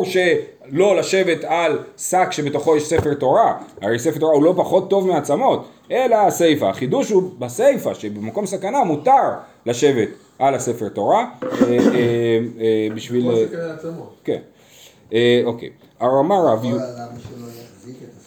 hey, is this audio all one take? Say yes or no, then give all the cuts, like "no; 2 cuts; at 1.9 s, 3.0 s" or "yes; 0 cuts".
no; 2 cuts; at 14.2 s, 15.9 s